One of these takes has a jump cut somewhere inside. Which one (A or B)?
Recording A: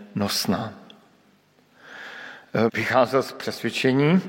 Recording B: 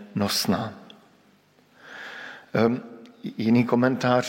A